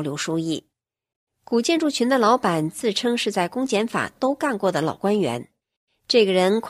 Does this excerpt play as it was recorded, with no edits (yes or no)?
yes